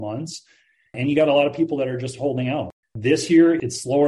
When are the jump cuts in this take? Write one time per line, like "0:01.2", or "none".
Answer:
0:02.8